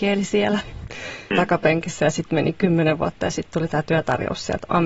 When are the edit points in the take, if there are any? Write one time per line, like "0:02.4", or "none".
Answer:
0:01.3